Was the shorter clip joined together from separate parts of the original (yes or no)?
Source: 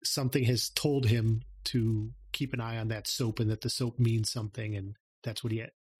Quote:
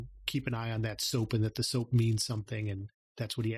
no